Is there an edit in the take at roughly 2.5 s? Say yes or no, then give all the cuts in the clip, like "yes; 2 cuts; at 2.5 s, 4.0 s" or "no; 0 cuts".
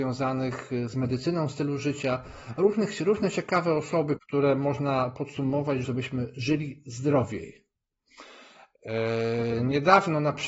no; 2 cuts; at 4.2 s, 5.8 s